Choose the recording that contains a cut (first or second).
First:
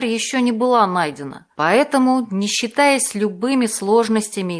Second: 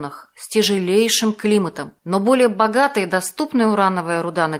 second